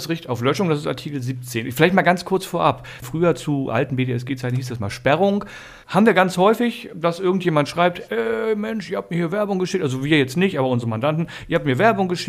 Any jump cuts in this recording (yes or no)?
yes